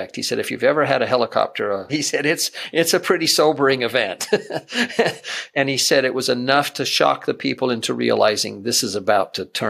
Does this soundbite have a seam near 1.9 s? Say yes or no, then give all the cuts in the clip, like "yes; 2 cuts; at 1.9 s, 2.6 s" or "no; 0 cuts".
yes; 1 cut; at 1.9 s